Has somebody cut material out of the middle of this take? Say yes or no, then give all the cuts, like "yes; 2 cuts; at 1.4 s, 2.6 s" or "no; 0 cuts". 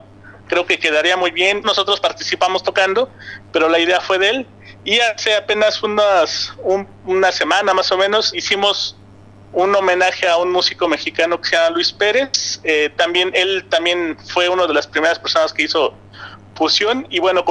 yes; 2 cuts; at 1.6 s, 8.3 s